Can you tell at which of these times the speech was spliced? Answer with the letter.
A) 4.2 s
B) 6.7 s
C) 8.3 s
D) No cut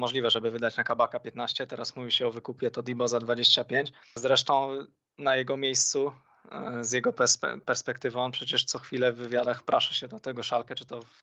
A